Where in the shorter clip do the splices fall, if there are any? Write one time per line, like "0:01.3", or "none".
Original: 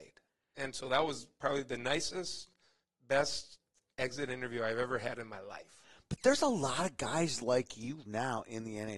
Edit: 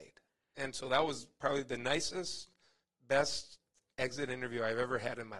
none